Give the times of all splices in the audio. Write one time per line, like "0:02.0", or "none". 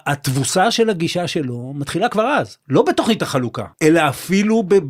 0:03.7